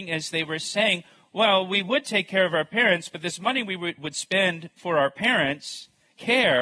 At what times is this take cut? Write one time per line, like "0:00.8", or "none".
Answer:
none